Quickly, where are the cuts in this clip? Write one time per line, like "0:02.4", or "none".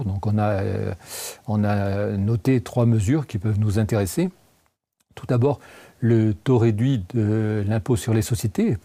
none